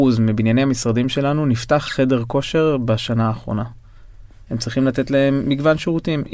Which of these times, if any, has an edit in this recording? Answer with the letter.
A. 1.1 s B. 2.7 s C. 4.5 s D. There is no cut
C